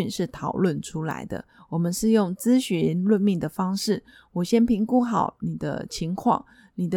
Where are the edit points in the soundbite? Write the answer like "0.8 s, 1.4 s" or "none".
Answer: none